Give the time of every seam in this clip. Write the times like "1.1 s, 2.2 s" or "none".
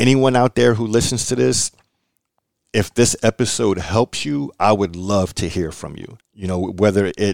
6.2 s